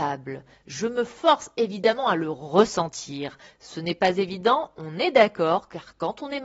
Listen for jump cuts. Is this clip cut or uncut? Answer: uncut